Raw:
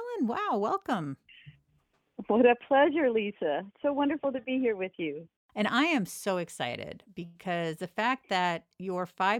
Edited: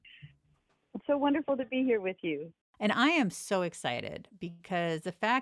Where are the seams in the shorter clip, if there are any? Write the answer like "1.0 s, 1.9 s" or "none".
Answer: 1.0 s